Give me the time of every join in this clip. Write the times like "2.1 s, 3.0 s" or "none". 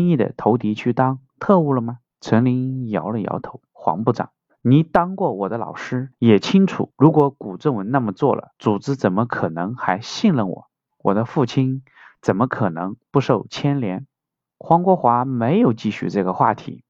2.1 s, 3.7 s